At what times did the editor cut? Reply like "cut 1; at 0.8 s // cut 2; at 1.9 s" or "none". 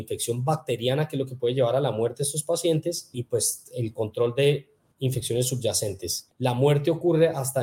cut 1; at 6.3 s